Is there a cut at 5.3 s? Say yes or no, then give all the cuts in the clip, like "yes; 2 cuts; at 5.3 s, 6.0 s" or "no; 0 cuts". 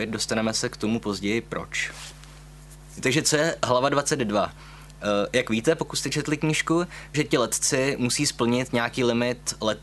no; 1 cut; at 7.1 s